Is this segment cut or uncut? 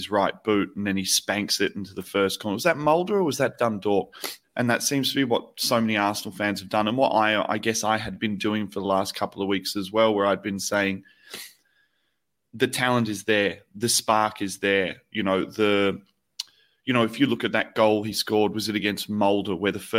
cut